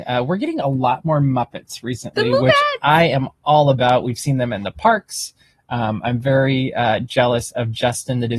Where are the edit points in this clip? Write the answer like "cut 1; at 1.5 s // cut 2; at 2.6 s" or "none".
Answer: none